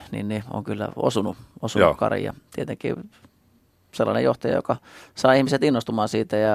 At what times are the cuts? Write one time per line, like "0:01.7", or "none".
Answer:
none